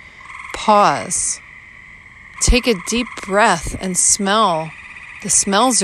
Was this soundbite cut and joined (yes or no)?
yes